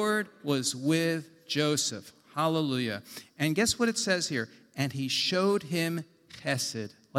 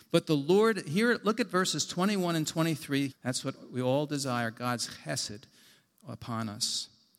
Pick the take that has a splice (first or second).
second